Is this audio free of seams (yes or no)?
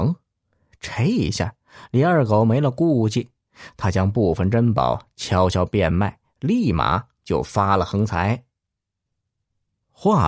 yes